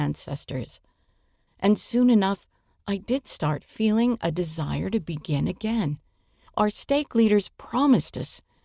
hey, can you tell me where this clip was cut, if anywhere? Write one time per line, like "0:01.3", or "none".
0:01.5
0:06.5